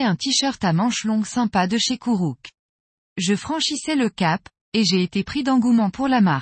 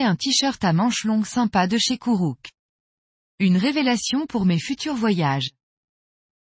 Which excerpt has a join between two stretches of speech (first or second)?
first